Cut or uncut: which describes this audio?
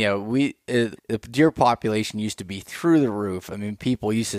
cut